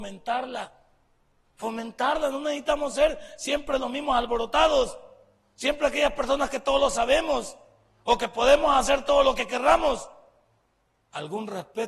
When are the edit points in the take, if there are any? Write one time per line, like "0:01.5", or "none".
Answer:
none